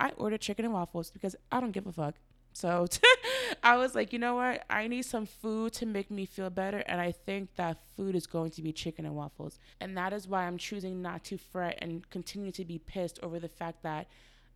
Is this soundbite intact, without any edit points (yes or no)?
no